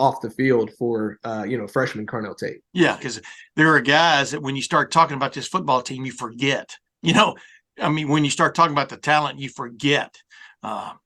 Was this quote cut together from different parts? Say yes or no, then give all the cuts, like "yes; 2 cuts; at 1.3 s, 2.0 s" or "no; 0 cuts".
yes; 1 cut; at 3.0 s